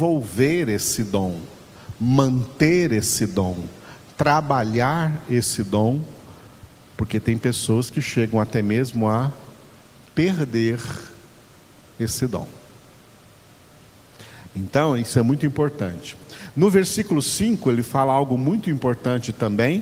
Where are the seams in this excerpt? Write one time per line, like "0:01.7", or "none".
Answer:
none